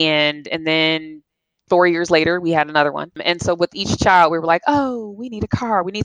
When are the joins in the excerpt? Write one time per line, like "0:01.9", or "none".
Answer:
none